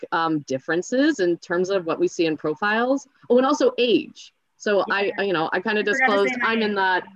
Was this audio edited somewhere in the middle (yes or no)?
no